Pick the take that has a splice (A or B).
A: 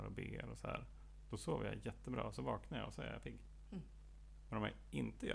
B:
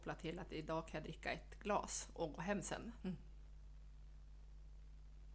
B